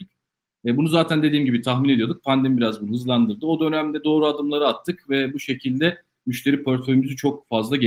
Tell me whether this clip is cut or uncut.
uncut